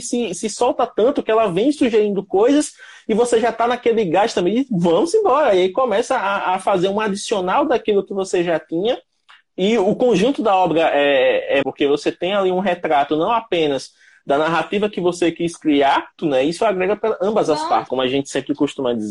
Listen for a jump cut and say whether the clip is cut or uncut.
cut